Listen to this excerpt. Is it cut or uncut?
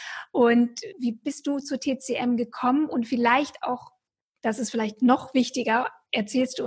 cut